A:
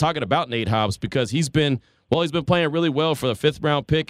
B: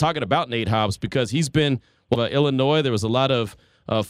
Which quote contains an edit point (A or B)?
B